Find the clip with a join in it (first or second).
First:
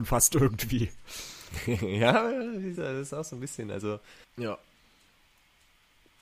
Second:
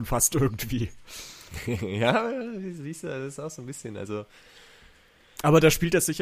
first